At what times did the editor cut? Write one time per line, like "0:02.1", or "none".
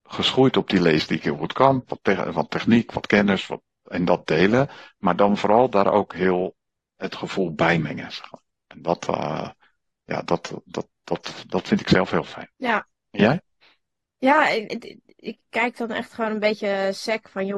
0:12.5
0:14.7